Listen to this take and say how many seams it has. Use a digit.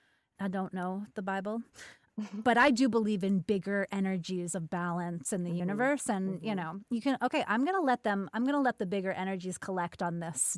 0